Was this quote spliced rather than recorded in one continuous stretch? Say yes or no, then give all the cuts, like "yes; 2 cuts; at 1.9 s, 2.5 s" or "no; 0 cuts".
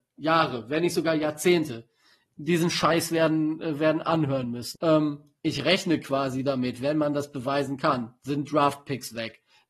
yes; 1 cut; at 4.8 s